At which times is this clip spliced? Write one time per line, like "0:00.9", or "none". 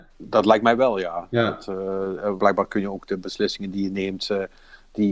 0:02.4